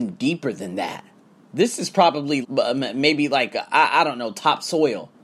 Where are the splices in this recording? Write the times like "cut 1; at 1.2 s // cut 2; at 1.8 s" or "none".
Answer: cut 1; at 2.4 s